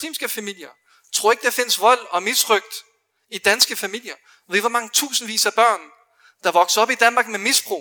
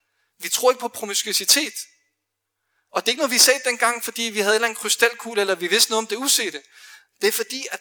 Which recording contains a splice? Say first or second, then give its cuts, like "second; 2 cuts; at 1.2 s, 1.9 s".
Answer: second; 1 cut; at 2.9 s